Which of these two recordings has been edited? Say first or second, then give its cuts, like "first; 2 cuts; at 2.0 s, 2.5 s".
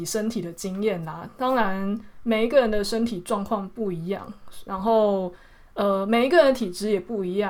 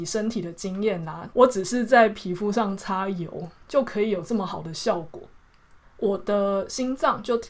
second; 2 cuts; at 1.3 s, 5.8 s